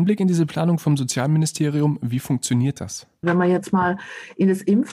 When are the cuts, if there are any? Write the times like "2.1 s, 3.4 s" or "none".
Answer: 3.2 s